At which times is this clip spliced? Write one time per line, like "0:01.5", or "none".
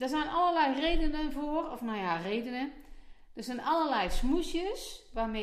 none